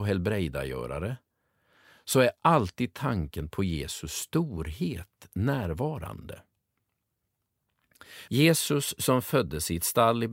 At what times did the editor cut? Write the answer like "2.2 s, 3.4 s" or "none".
8.3 s